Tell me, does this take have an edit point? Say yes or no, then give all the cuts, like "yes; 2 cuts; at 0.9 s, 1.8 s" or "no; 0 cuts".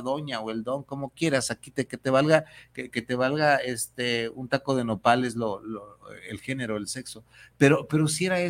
no; 0 cuts